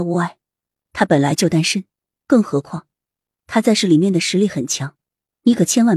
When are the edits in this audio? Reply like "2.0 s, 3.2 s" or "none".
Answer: none